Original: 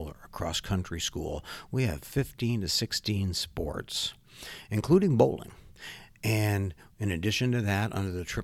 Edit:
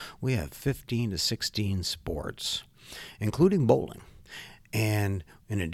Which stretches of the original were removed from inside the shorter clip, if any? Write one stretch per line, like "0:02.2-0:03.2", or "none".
none